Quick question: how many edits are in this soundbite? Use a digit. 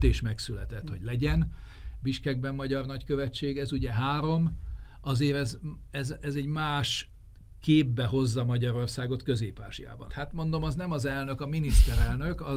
1